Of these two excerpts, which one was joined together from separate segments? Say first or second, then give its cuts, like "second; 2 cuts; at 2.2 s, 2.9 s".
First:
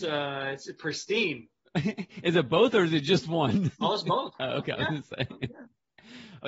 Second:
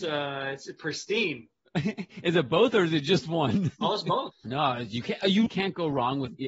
second; 2 cuts; at 4.3 s, 5.5 s